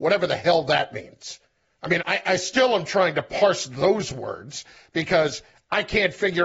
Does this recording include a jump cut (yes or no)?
yes